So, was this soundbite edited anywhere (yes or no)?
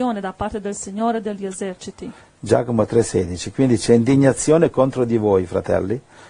no